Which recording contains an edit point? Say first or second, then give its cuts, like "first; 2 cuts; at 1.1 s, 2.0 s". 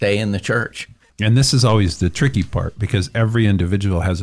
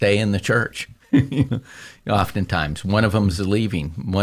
first; 1 cut; at 1.1 s